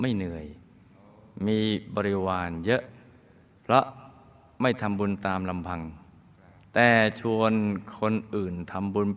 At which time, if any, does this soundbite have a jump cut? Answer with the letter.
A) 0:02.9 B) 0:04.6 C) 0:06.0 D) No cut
D